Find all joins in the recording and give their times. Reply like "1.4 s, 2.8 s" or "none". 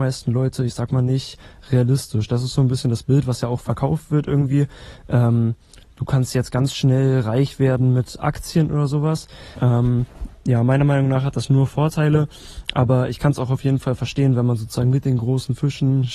9.6 s